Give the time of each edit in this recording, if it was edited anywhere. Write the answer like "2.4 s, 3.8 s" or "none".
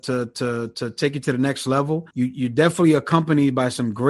2.1 s